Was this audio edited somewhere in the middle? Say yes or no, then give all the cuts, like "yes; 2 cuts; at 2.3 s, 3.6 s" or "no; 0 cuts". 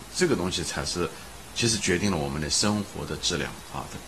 yes; 1 cut; at 1.5 s